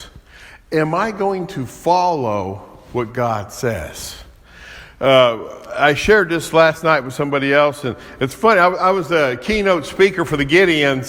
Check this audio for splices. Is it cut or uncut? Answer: uncut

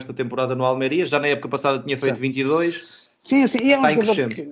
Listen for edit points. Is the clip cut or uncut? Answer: uncut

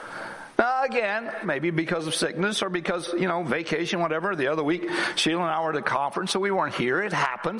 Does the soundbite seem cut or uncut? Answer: cut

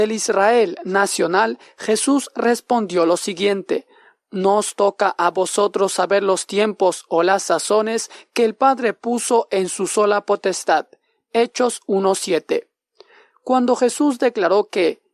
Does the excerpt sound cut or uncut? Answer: uncut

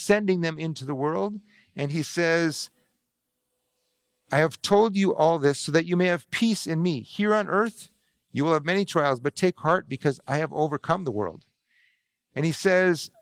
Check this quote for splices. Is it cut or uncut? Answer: uncut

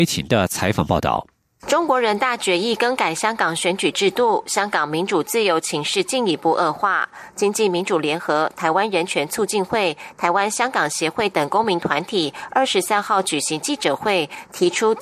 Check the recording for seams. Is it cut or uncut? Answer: uncut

